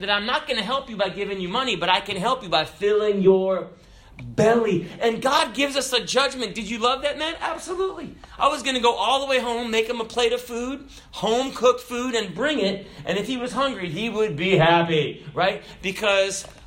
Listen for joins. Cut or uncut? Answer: uncut